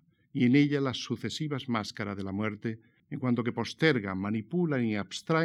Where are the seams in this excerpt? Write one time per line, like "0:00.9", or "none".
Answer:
0:03.0